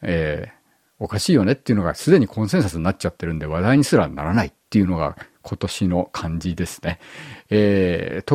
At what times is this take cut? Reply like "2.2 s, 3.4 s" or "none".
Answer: none